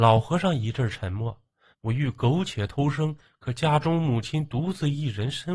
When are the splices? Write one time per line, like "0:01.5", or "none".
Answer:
0:01.7